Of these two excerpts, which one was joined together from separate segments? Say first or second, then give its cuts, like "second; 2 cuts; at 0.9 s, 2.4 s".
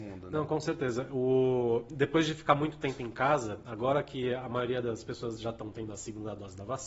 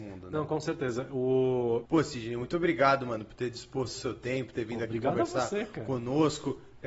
second; 1 cut; at 1.9 s